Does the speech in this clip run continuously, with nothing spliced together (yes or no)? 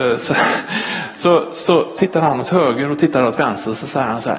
no